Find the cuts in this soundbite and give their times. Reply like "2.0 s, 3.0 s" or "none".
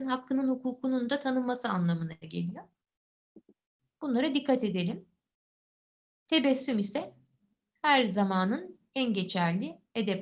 none